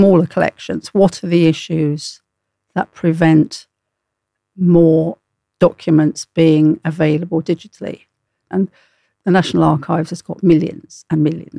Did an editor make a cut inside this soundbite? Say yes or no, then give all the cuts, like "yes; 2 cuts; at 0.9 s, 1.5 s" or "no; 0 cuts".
yes; 1 cut; at 8.5 s